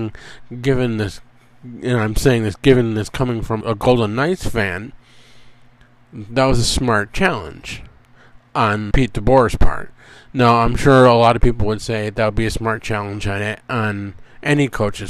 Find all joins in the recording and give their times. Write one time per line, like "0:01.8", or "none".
0:03.6
0:08.9